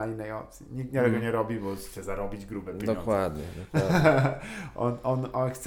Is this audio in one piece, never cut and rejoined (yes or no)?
yes